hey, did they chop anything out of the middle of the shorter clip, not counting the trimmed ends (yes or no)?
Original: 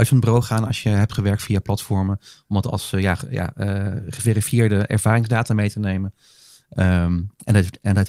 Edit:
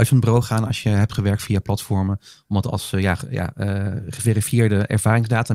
no